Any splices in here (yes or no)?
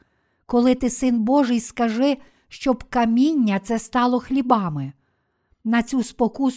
no